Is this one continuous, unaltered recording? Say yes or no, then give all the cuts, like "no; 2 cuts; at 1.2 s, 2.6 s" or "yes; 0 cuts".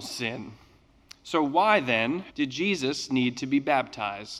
no; 1 cut; at 2.3 s